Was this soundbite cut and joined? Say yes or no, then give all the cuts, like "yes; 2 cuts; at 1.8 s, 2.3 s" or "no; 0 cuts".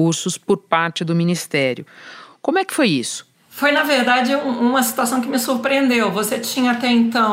no; 0 cuts